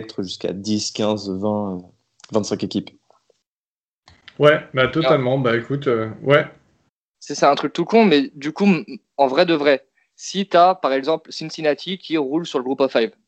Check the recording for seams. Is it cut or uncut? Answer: uncut